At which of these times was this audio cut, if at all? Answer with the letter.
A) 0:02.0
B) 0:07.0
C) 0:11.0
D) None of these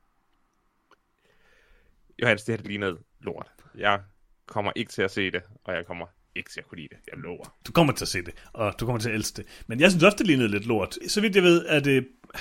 C